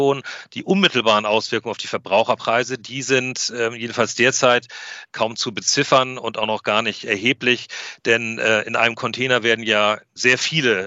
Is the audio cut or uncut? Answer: uncut